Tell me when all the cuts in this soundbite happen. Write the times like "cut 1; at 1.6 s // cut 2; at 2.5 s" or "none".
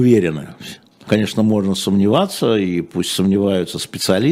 cut 1; at 1.1 s

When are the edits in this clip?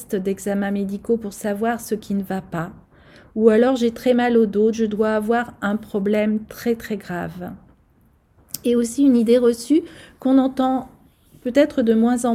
cut 1; at 4.7 s

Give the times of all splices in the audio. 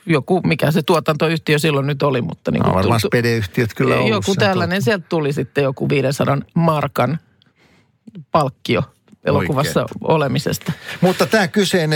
none

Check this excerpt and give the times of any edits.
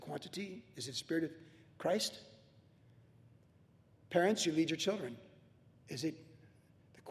none

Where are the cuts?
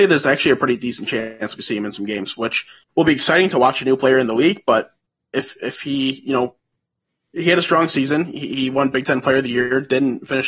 none

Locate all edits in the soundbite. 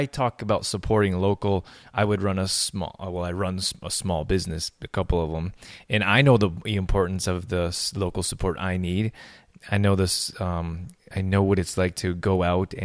none

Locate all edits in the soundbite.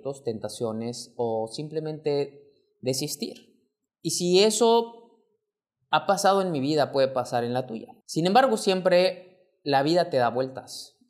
cut 1; at 3.9 s // cut 2; at 8.0 s

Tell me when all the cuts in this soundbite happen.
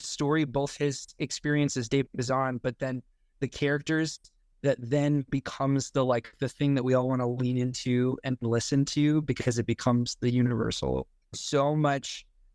cut 1; at 11.3 s

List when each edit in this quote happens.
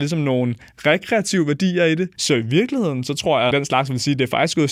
cut 1; at 2.2 s // cut 2; at 3.5 s

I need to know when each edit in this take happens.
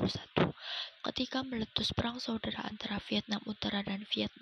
cut 1; at 1.0 s

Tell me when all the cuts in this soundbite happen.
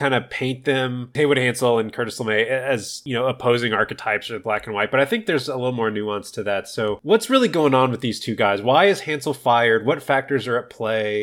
none

